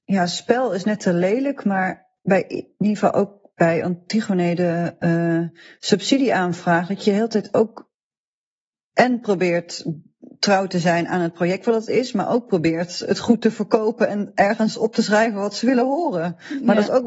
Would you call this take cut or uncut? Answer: uncut